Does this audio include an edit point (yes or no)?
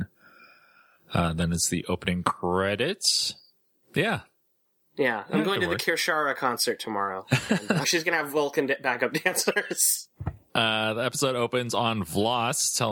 yes